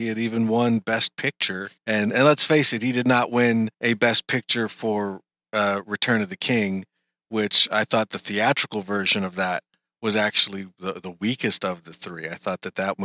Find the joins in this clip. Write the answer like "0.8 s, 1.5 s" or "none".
1.8 s, 3.7 s